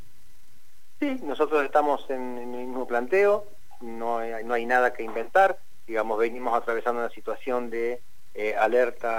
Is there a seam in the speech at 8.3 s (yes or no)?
no